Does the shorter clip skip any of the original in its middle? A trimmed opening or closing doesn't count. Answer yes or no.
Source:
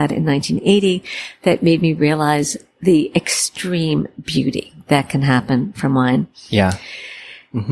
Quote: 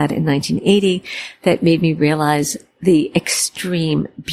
no